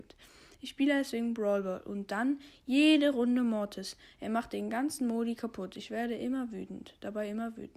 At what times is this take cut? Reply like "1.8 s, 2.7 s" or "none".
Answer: none